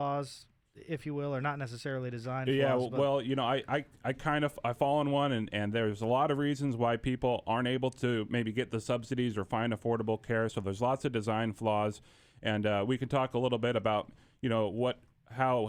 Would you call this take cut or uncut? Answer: uncut